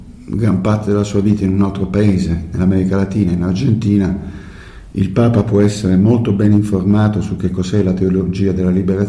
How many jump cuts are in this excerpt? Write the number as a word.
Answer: zero